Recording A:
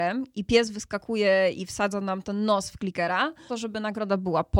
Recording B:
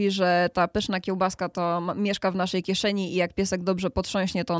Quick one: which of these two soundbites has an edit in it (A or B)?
A